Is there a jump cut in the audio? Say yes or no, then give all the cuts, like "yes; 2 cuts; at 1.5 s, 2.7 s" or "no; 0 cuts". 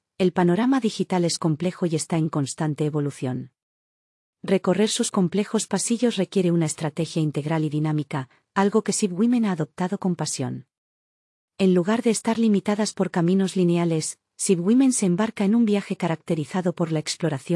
no; 0 cuts